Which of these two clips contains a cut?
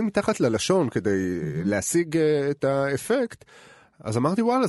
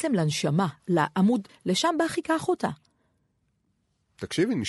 second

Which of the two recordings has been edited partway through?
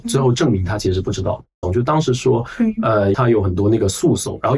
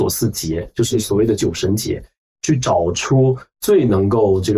first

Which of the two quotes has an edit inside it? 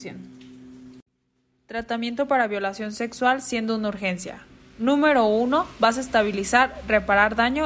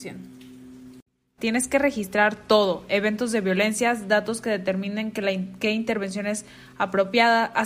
second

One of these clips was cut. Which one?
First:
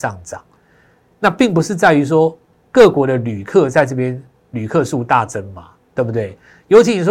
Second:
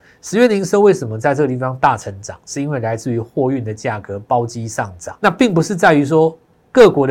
second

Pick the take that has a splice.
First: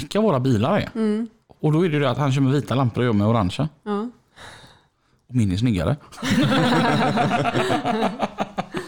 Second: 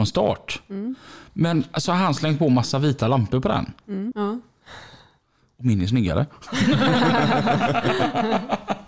second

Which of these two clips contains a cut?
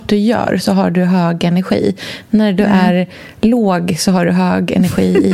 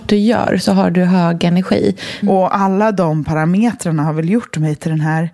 second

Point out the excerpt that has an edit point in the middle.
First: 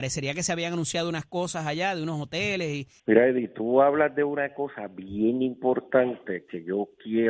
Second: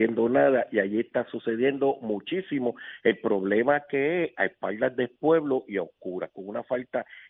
first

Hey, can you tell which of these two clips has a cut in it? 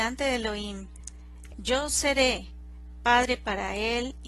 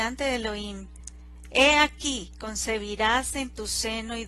first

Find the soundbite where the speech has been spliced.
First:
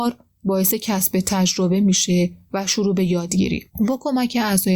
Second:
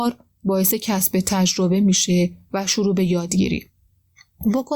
first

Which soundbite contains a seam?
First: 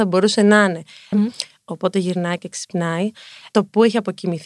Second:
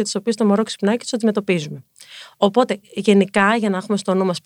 first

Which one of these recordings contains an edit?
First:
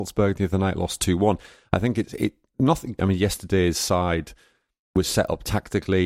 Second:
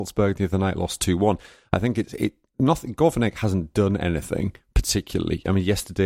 first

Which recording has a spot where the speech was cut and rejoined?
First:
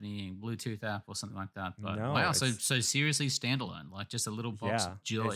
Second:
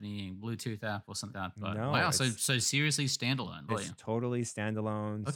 second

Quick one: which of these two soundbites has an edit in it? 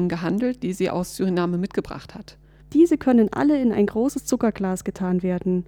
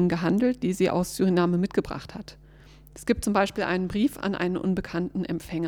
first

